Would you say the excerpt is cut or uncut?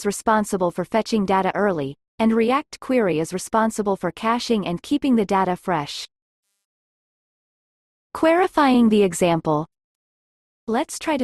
cut